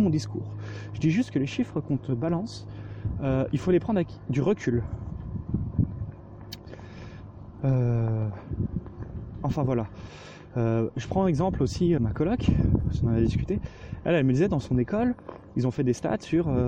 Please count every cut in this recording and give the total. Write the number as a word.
one